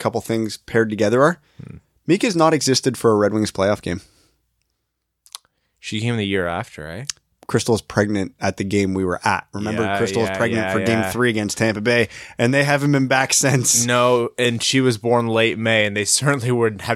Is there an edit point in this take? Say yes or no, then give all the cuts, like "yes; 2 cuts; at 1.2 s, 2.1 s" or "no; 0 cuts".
no; 0 cuts